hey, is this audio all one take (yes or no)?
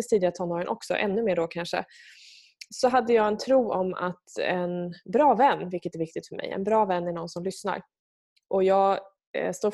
yes